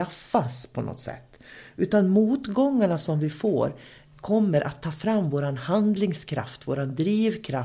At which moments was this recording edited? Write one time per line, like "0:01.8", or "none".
none